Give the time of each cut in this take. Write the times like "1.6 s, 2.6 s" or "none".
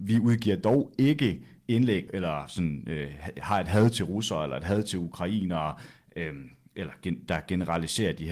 2.1 s